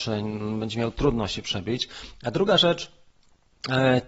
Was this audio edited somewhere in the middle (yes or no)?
no